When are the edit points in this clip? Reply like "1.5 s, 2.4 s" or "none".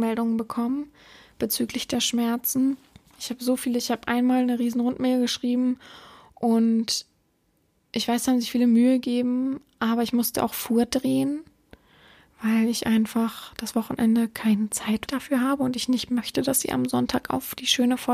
3.1 s, 15.1 s